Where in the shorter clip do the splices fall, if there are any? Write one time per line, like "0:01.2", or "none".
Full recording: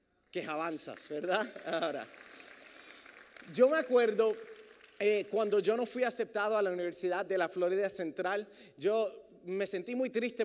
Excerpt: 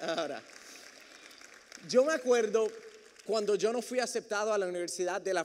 0:03.3